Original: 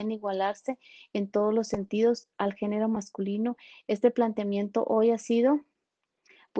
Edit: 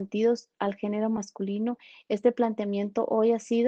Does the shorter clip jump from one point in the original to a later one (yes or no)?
no